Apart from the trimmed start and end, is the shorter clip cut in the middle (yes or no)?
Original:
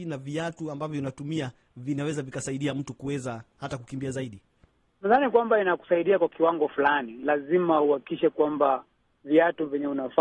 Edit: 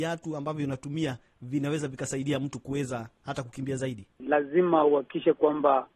yes